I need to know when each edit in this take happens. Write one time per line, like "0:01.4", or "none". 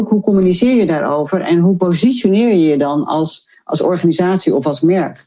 none